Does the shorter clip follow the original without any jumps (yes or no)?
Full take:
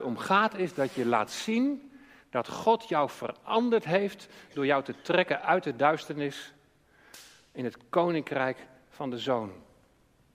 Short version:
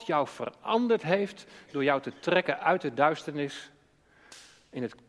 yes